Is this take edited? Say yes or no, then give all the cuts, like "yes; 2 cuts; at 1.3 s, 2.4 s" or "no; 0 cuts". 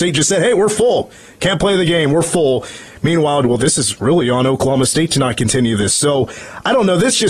yes; 1 cut; at 3.4 s